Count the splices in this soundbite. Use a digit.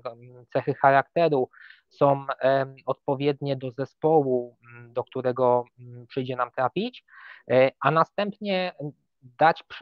1